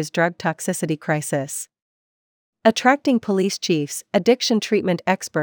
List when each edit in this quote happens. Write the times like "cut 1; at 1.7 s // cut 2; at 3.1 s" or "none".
none